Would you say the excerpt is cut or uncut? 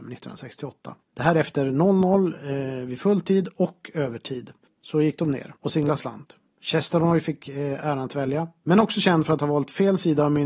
cut